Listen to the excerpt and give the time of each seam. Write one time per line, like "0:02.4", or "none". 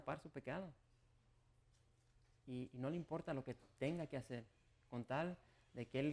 none